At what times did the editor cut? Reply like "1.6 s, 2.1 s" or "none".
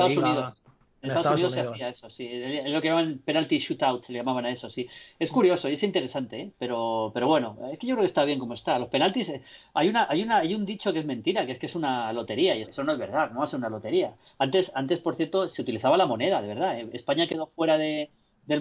12.6 s, 15.5 s